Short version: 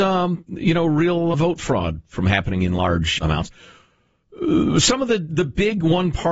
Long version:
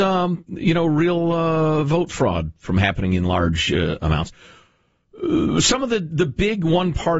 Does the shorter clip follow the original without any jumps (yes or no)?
no